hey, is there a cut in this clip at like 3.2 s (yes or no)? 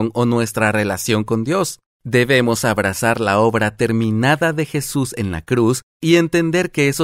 no